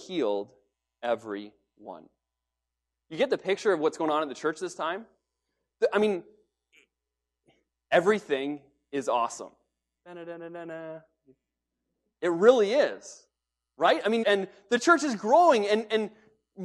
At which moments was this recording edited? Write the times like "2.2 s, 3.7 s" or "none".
14.2 s